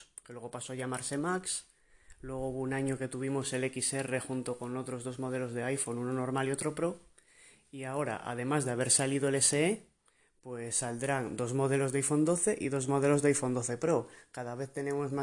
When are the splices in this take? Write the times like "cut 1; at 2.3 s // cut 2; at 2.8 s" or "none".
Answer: none